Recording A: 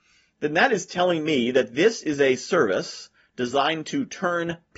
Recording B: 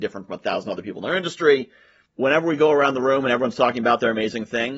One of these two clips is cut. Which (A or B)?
B